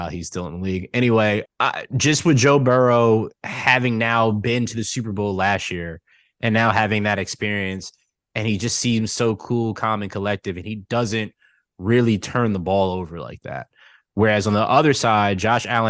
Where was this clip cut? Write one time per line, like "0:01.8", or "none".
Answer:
0:01.5